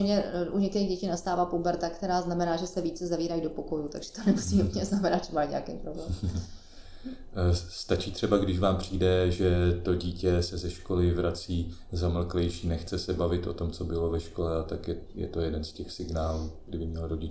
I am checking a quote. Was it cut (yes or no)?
no